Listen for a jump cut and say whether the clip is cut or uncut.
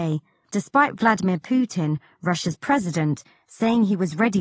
uncut